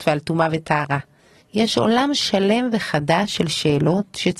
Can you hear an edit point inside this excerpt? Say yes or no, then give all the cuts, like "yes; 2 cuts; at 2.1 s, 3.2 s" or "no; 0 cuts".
yes; 1 cut; at 1.4 s